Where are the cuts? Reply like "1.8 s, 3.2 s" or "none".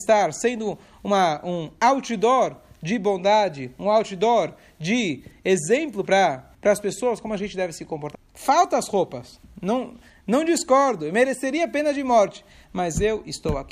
6.5 s, 8.1 s

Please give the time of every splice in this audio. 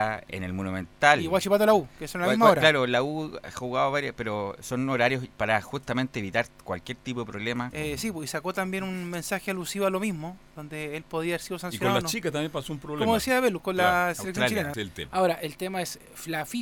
7.7 s, 14.7 s

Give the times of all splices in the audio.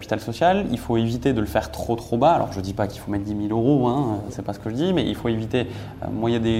none

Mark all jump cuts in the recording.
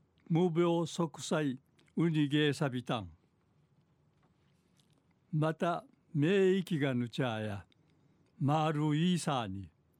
1.9 s

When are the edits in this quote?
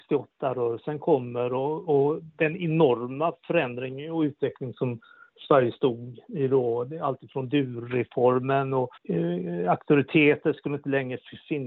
9.0 s

